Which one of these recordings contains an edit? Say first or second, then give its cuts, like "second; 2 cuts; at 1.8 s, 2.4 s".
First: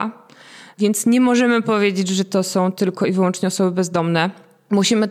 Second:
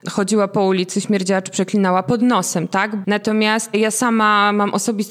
second; 1 cut; at 3.0 s